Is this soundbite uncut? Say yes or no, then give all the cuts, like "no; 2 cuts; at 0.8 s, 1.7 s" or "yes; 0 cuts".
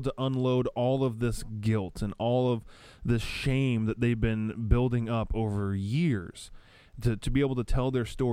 yes; 0 cuts